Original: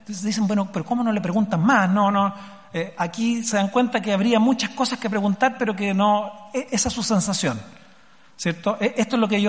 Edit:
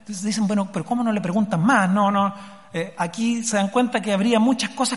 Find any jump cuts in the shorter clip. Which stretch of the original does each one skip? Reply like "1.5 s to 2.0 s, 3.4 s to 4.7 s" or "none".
none